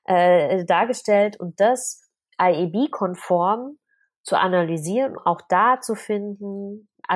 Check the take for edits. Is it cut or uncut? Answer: cut